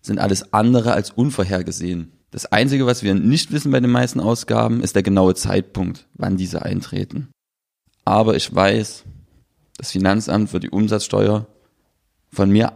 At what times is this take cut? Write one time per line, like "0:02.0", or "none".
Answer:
0:02.2
0:07.9